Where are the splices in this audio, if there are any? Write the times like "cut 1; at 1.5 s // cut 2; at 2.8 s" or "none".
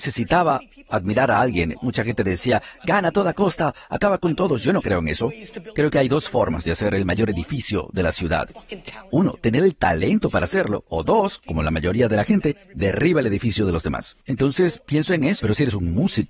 cut 1; at 14.2 s // cut 2; at 15.4 s